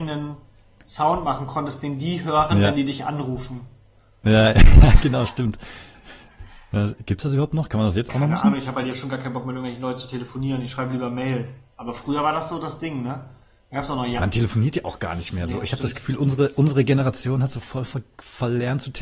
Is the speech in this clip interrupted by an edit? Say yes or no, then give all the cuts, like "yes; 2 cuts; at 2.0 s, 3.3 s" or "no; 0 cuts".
no; 0 cuts